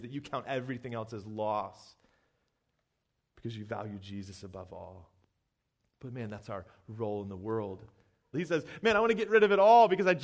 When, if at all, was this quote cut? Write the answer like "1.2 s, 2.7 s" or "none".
8.3 s

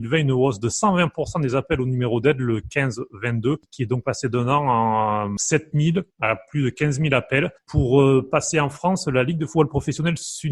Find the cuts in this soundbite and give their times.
7.6 s

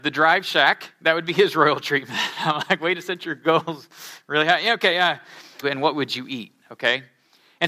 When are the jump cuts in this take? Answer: 5.6 s

